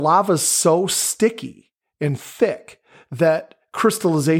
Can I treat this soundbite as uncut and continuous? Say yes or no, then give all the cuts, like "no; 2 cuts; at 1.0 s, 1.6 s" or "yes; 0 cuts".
yes; 0 cuts